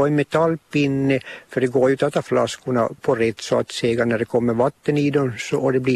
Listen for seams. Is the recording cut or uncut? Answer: cut